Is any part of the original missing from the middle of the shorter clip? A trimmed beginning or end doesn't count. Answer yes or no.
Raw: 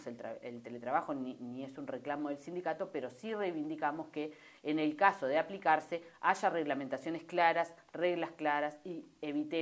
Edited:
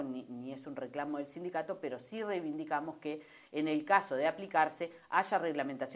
no